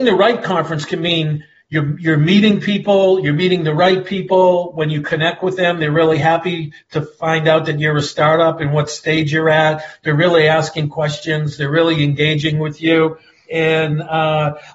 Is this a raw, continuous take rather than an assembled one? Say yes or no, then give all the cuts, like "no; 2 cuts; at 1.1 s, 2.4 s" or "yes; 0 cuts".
no; 1 cut; at 13.5 s